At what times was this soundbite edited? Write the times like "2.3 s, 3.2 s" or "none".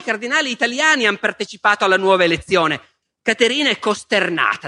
3.0 s